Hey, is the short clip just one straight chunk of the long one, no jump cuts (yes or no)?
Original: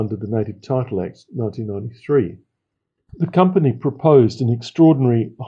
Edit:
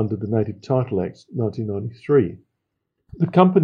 yes